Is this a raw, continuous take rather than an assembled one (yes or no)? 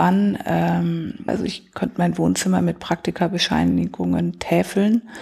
no